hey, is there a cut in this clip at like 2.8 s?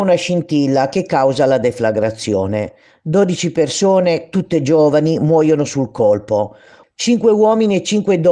no; 1 cut; at 6.8 s

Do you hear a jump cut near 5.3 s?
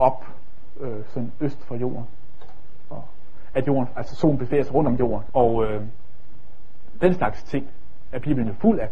yes; 1 cut; at 5.3 s

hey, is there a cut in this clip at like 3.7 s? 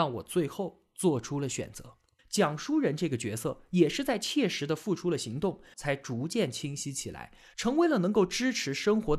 no; 2 cuts; at 2.2 s, 5.7 s

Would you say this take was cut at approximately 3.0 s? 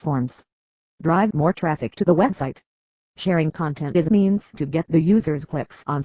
yes; 1 cut; at 3.0 s

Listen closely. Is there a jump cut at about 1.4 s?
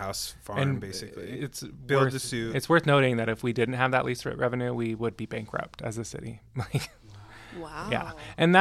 no; 0 cuts

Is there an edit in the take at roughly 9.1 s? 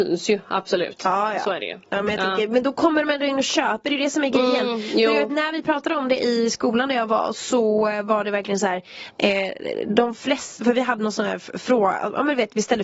no; 0 cuts

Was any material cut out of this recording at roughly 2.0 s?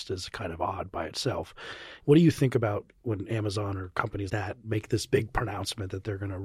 yes; 2 cuts; at 2.0 s, 4.3 s

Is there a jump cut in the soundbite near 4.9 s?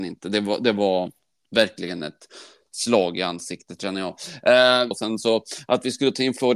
yes; 1 cut; at 4.9 s

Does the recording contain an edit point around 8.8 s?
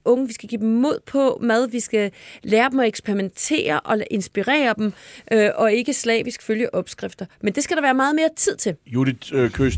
no; 0 cuts

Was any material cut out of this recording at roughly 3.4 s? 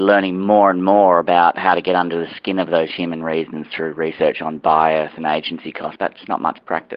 no; 1 cut; at 6.0 s

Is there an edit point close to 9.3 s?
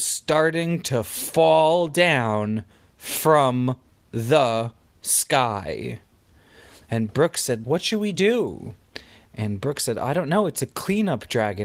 yes; 2 cuts; at 7.6 s, 9.3 s

